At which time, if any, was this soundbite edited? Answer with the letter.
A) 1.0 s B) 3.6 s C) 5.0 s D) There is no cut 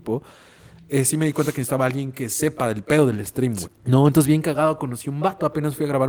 B